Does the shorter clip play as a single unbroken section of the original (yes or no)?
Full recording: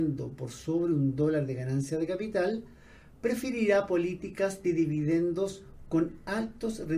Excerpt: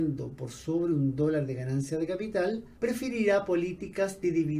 no